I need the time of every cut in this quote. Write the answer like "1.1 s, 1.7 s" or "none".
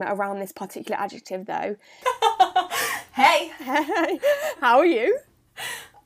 2.0 s

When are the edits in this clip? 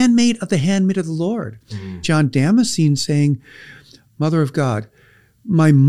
2.0 s, 4.1 s

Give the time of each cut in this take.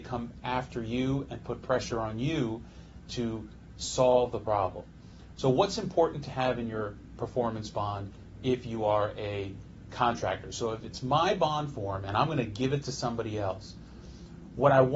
5.4 s

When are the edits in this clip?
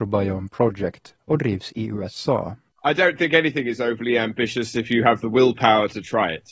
2.7 s

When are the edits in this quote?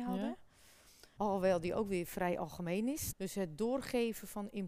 1.2 s, 3.1 s

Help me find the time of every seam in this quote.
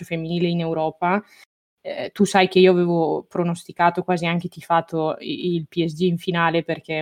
none

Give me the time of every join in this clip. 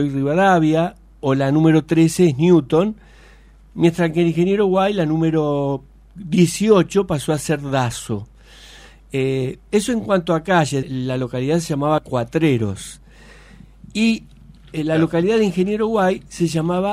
10.8 s

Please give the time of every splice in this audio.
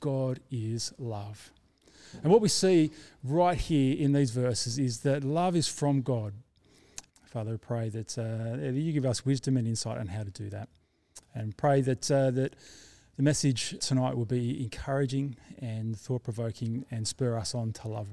7.1 s, 13.8 s

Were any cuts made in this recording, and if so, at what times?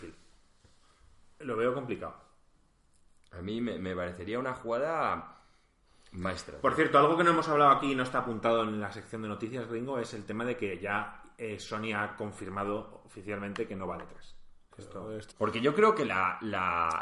15.3 s

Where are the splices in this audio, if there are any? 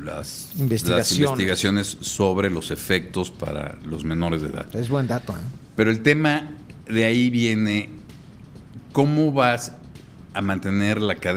none

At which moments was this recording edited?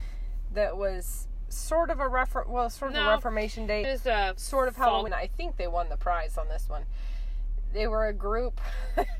3.8 s, 5.1 s

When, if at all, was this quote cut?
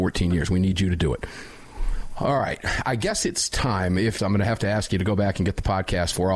4.2 s

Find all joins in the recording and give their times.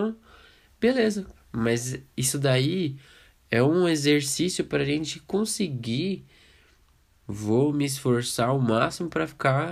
1.4 s, 7.1 s

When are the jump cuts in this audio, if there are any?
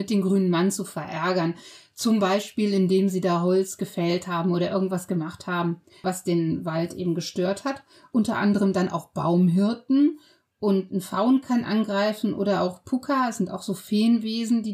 8.1 s

